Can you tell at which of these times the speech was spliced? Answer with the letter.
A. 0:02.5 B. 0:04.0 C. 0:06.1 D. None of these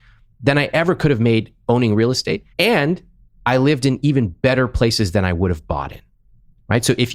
A